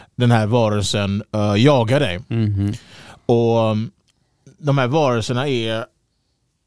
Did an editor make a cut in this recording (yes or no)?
no